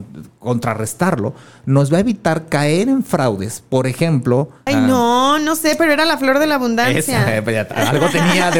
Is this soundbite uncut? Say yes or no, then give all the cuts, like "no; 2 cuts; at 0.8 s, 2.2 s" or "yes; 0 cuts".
no; 1 cut; at 4.7 s